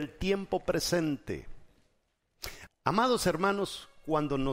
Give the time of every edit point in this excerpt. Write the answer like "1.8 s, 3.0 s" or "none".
2.7 s